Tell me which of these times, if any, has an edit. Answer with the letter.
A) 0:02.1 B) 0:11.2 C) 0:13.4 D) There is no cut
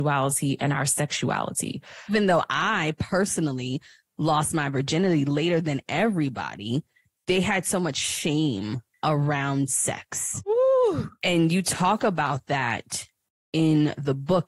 A